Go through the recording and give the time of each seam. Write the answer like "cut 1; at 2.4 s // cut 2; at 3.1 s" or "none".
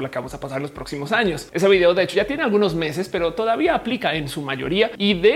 none